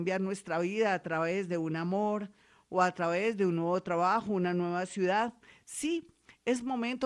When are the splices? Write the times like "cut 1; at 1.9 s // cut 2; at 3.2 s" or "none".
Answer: none